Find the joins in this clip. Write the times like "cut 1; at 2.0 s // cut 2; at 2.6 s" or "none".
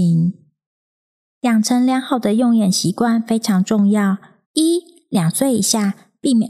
cut 1; at 4.4 s

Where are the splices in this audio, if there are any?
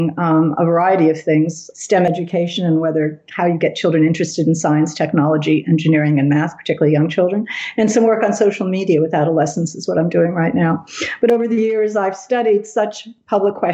cut 1; at 1.7 s

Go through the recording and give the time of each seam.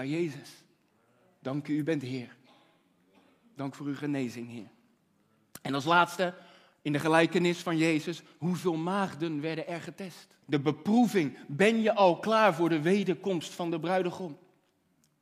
cut 1; at 10.4 s

